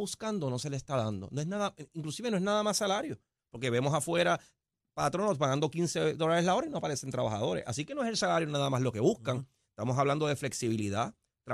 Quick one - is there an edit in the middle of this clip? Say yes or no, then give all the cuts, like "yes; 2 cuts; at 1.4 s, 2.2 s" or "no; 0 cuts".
no; 0 cuts